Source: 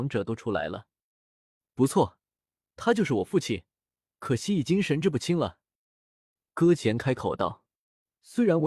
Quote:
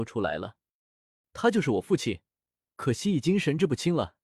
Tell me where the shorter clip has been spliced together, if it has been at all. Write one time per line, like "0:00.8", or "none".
0:01.2